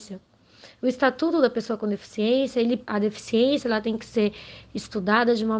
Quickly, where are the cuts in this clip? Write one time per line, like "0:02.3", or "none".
0:02.9